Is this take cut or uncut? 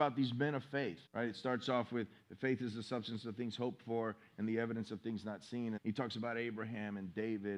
cut